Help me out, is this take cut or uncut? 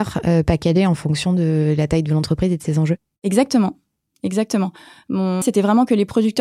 cut